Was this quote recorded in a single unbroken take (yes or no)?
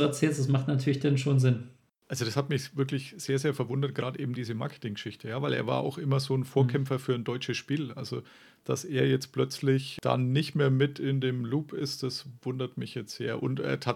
yes